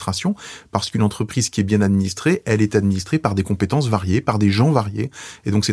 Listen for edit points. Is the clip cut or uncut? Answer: uncut